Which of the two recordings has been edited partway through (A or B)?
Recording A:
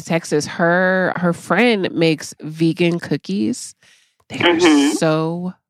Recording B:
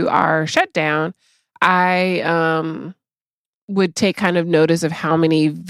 A